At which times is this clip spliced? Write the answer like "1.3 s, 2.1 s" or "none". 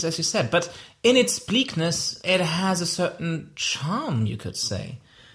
none